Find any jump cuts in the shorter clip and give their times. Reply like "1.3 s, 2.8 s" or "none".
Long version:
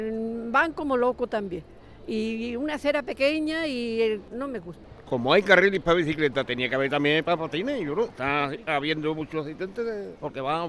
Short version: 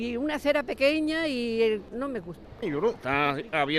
2.6 s